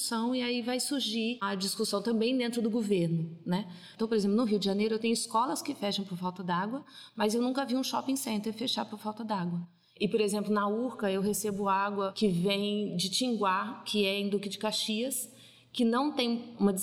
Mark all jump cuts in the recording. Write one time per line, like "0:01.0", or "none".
none